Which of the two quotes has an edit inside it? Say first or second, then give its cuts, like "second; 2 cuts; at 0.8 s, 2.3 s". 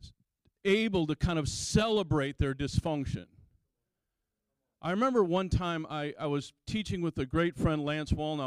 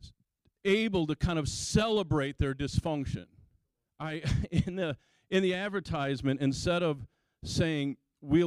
second; 1 cut; at 3.9 s